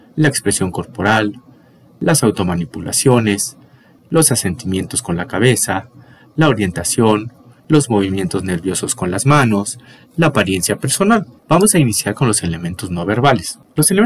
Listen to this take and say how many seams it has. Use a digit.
2